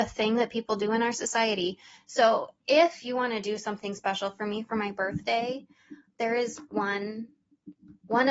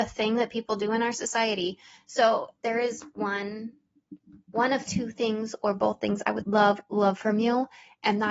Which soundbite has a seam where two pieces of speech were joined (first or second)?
second